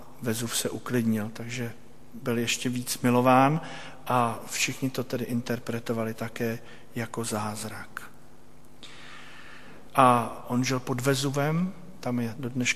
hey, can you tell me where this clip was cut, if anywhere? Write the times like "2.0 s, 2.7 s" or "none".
9.9 s